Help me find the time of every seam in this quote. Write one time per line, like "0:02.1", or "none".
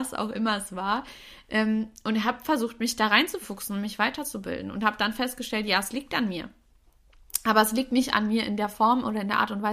none

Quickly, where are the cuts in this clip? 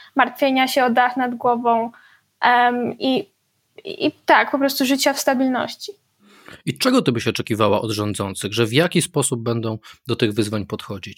none

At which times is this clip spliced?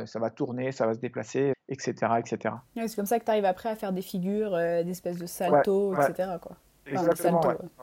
0:01.5

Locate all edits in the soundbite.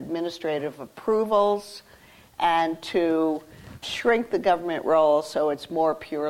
0:03.8

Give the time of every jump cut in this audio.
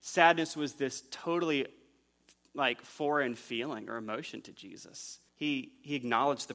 0:05.3

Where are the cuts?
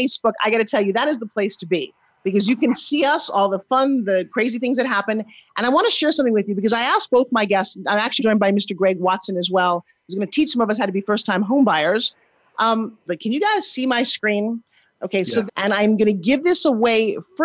0:08.2
0:13.1
0:15.5

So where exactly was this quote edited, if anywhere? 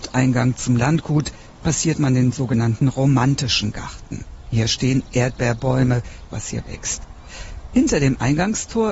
0:06.3

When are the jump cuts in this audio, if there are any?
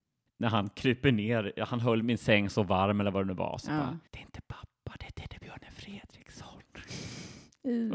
0:04.1

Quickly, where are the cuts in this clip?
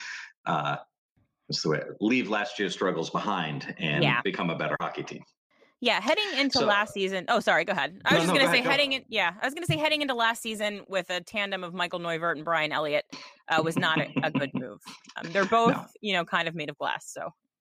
none

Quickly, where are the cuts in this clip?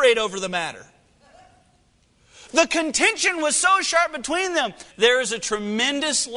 0:02.5
0:04.9

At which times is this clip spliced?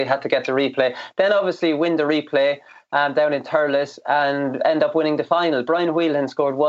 none

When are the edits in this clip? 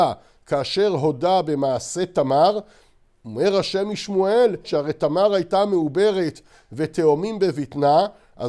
0:04.6

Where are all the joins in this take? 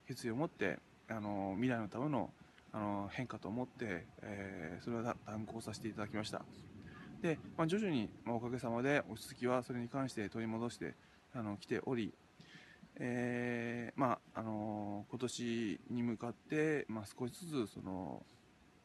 none

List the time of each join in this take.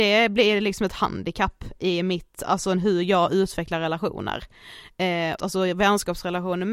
0:05.4

